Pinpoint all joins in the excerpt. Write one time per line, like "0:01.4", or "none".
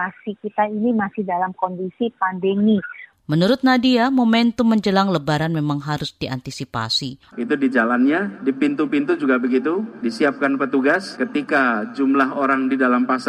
0:07.3